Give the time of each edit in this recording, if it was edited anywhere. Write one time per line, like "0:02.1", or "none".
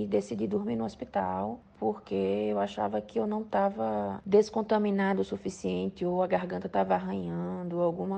none